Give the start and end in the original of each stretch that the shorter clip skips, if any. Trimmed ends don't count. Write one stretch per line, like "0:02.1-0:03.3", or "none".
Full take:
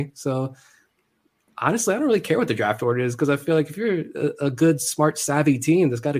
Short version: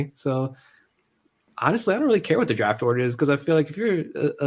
none